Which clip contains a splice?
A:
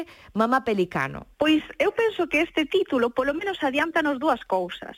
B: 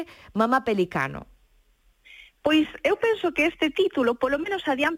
A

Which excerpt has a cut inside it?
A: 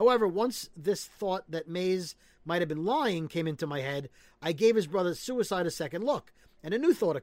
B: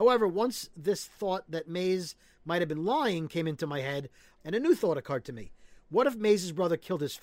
B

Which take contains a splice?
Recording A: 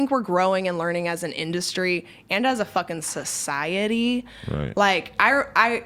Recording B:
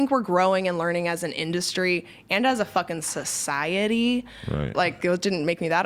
B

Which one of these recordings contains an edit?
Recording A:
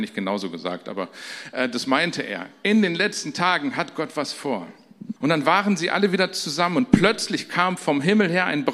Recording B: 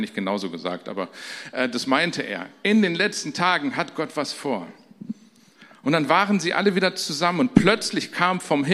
A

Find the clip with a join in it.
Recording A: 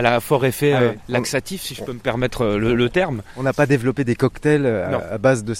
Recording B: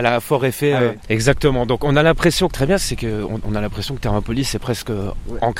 B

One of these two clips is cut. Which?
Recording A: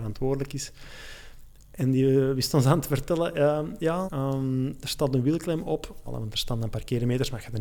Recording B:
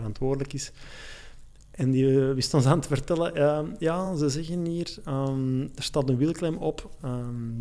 A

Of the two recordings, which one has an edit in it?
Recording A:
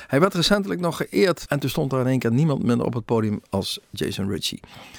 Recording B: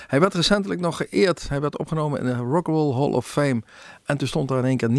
A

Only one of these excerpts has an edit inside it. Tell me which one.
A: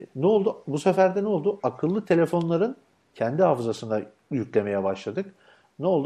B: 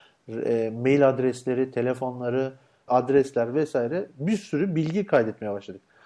B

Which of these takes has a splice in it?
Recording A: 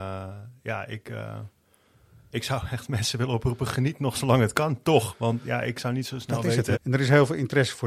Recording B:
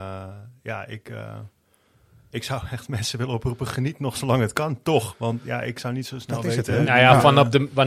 A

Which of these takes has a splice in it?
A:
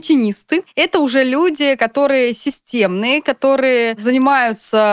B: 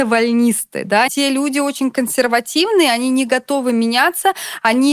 B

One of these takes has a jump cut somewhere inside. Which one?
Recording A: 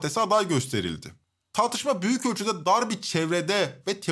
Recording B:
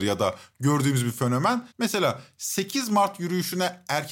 B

